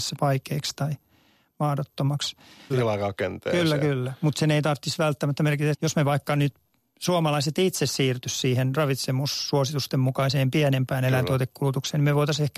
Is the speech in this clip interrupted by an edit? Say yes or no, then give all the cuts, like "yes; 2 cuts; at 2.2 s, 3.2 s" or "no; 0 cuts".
yes; 2 cuts; at 2.7 s, 5.7 s